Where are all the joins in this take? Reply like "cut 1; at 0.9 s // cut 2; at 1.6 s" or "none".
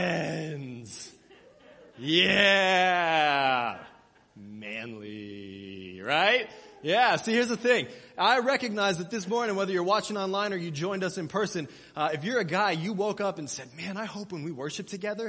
none